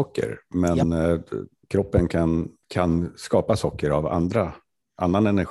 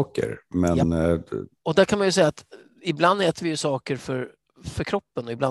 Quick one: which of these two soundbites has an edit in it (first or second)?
second